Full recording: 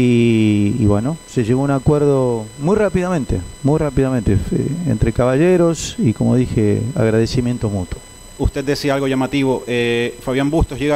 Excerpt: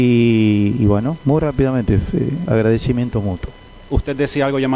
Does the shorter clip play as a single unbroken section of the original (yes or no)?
no